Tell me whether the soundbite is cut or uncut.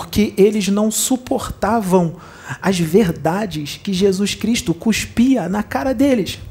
uncut